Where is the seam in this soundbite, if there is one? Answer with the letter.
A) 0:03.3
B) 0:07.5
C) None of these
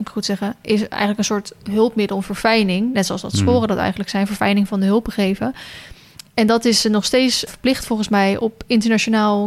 B